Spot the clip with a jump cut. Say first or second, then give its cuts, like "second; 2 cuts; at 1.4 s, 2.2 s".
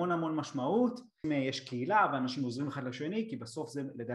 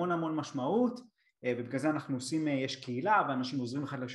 first; 1 cut; at 1.2 s